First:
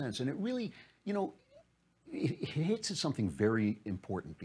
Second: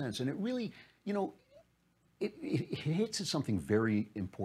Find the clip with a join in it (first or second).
first